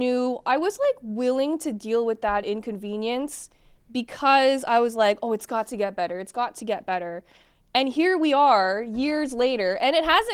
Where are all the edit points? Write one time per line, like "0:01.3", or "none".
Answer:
none